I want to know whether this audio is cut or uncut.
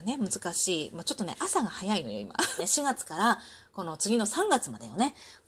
cut